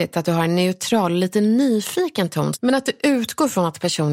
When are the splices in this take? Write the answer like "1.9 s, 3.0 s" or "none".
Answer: 2.5 s